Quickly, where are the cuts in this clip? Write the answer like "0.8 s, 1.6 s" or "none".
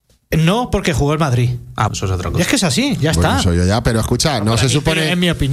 1.9 s